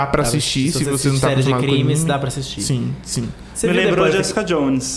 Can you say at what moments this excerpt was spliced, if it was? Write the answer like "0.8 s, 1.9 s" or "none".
none